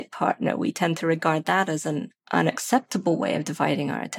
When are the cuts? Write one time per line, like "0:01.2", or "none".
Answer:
0:02.2